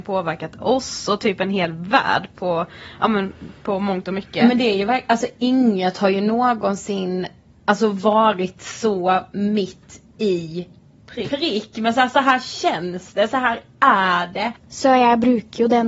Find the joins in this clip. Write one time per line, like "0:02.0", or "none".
0:14.6